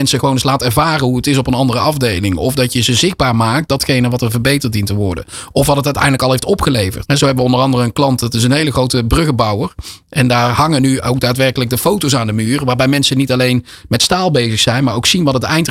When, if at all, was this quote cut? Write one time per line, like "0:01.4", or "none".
0:07.0

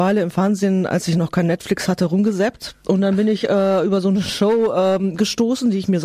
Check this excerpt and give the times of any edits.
none

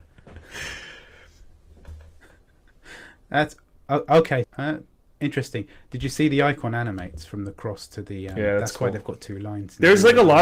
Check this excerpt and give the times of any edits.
0:04.4

